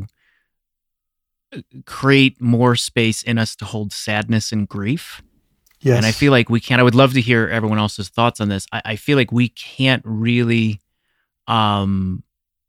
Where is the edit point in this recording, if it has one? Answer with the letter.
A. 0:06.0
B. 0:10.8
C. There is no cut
C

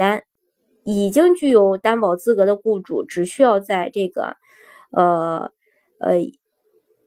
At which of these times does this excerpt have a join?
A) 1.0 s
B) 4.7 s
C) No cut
C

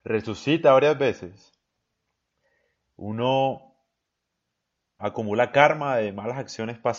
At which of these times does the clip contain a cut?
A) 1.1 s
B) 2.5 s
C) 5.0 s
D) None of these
C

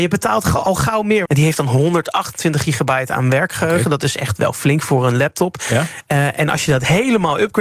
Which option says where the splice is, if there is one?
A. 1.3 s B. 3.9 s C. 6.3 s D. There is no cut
A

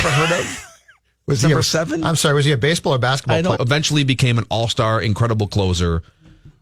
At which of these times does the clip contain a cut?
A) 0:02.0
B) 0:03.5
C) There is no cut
B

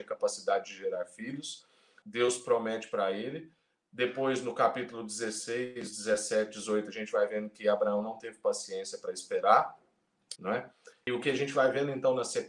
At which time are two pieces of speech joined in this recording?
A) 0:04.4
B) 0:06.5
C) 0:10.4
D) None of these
C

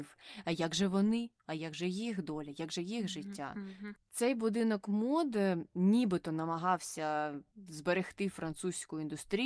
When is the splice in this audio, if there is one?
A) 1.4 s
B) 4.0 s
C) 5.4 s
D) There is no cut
B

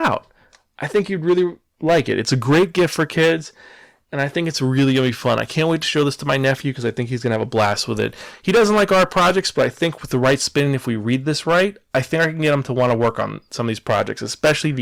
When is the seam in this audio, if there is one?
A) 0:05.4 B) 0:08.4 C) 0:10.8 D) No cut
D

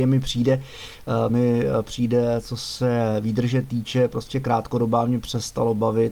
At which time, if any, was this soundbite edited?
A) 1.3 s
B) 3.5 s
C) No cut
C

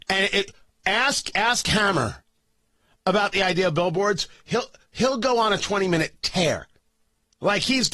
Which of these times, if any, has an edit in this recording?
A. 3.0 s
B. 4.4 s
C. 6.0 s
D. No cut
D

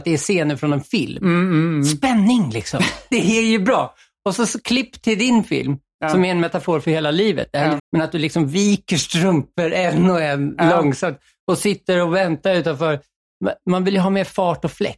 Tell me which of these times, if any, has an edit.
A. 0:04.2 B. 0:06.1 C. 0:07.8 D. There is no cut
C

